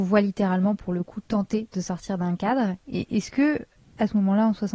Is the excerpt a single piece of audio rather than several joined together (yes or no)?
yes